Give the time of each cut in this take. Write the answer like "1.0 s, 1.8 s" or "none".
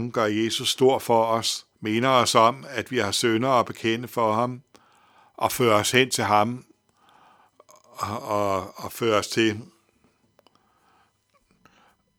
1.7 s

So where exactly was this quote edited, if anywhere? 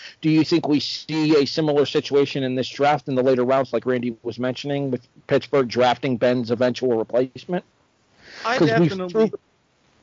none

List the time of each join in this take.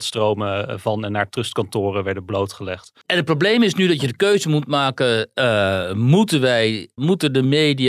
3.0 s

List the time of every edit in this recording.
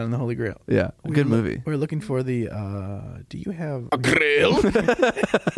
1.0 s, 3.9 s

